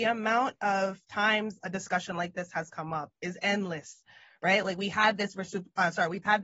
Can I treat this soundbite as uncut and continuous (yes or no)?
yes